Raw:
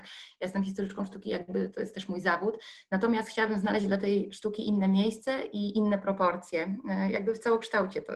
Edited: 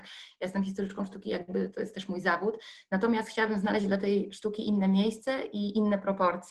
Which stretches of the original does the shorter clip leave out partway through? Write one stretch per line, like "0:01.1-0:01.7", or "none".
none